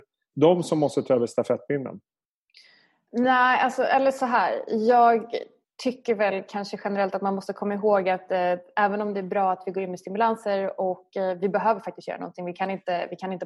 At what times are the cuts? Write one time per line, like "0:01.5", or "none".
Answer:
none

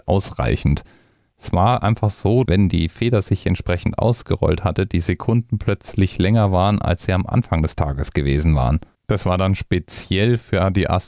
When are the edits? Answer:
0:02.5

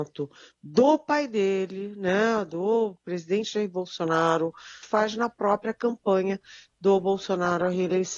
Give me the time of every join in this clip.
0:04.8

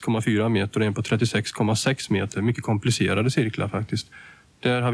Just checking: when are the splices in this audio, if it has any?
none

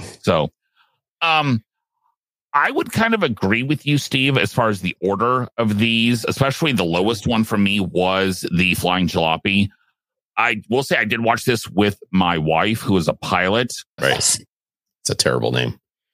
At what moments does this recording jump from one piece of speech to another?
0:14.0

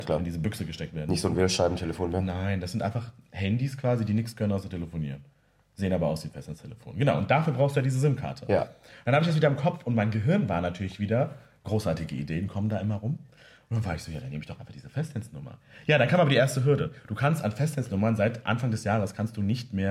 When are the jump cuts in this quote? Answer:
none

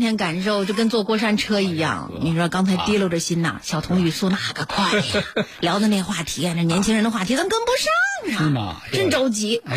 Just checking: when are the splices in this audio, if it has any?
none

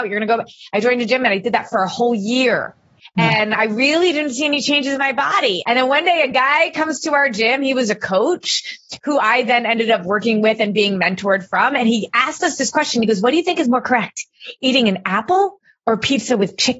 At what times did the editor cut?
0:05.6

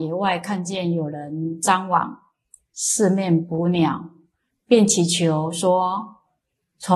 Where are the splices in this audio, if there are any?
none

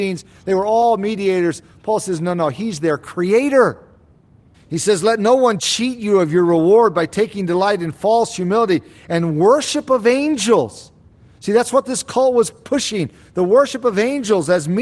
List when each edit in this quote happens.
0:04.5

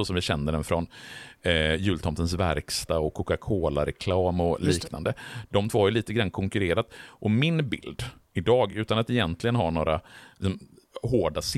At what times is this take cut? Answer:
none

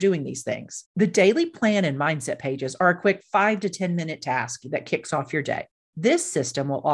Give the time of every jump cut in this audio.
0:05.8

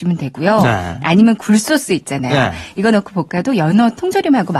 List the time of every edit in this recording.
none

